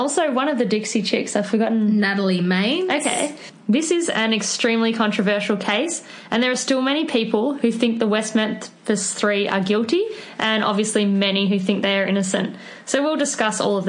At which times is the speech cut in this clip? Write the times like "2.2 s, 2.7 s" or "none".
none